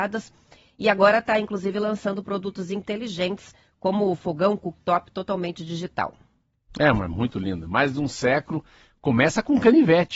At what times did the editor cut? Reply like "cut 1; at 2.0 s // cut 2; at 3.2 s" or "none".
none